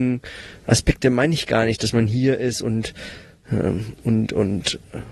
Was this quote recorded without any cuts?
yes; 0 cuts

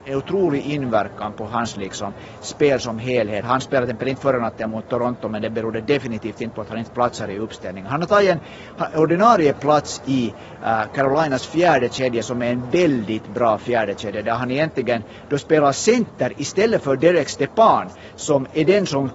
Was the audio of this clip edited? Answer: yes; 1 cut; at 3.4 s

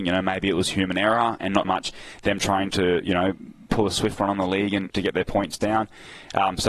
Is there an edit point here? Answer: yes; 2 cuts; at 1.6 s, 4.9 s

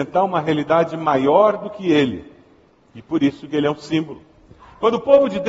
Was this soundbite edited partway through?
no; 0 cuts

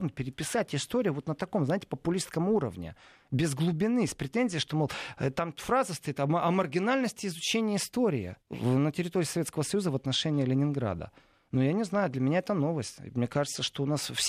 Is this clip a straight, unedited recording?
no; 1 cut; at 8.4 s

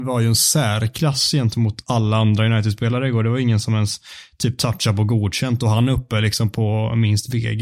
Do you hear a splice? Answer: no; 0 cuts

